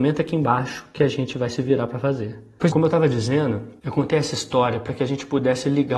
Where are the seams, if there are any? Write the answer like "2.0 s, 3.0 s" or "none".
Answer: 2.7 s